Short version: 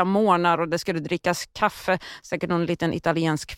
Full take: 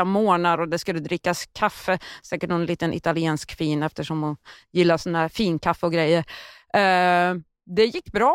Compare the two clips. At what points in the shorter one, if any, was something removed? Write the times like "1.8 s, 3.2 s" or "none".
none